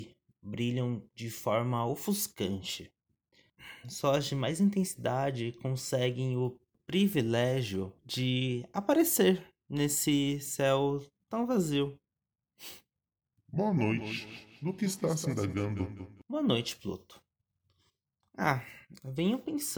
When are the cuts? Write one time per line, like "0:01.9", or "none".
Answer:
0:08.0
0:16.2